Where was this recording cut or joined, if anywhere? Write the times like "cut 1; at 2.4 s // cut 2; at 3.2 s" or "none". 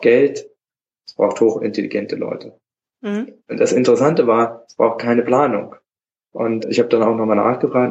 cut 1; at 3.4 s // cut 2; at 6.6 s